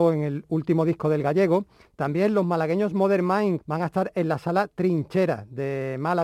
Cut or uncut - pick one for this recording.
cut